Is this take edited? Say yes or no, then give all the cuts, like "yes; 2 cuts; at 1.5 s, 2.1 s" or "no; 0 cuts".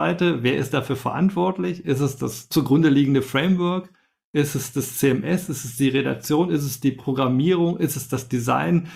no; 0 cuts